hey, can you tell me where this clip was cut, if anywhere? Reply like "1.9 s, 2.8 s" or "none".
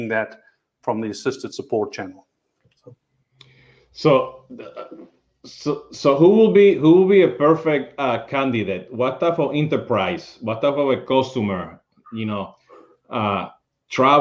none

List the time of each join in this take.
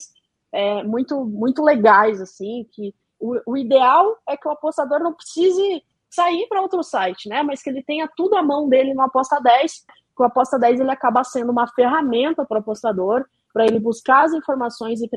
9.9 s

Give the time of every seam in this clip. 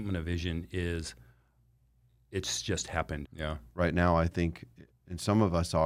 3.2 s, 4.9 s

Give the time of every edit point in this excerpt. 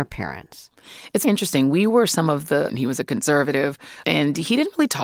1.2 s, 2.7 s

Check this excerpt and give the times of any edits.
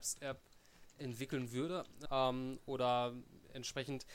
2.1 s

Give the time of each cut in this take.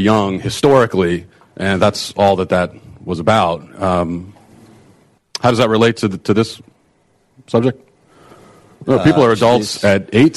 8.8 s

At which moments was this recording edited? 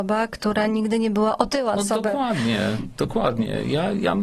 1.8 s

